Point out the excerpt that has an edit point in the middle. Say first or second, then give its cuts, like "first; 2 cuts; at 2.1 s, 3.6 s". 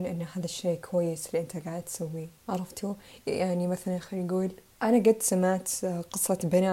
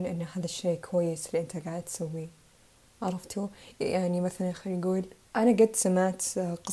first; 1 cut; at 2.4 s